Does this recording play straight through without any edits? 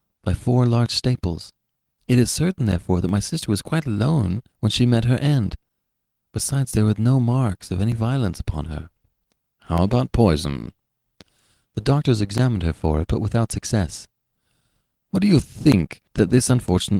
yes; 0 cuts

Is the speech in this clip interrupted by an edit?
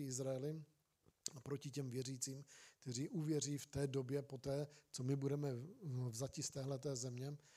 no; 0 cuts

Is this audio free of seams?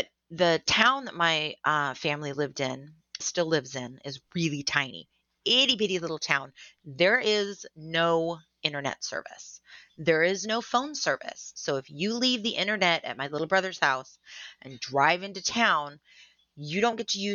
no; 1 cut; at 3.2 s

